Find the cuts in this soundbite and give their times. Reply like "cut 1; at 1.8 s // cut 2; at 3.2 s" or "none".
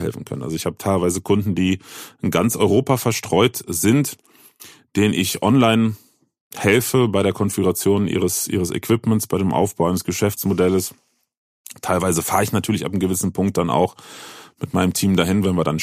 none